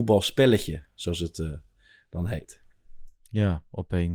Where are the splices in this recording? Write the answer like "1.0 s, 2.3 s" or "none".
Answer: 3.1 s

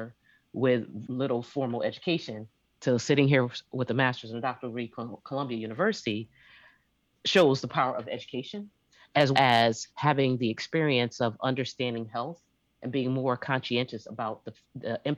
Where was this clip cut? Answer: 1.0 s, 9.3 s

